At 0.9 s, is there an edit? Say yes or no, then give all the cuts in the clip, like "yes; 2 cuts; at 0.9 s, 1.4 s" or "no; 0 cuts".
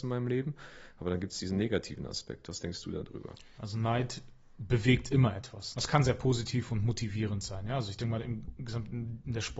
no; 2 cuts; at 3.6 s, 5.7 s